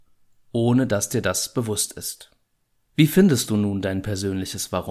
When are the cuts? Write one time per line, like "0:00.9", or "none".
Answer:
0:02.9